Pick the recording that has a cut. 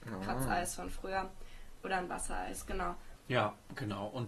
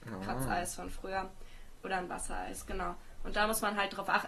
first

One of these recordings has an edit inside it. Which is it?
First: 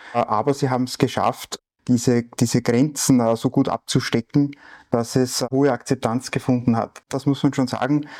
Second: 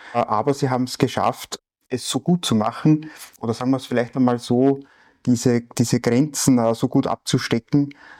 first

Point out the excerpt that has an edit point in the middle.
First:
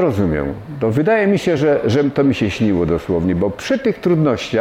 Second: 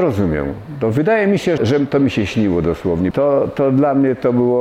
second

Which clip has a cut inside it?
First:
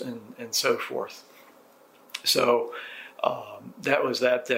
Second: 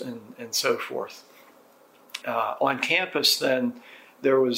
second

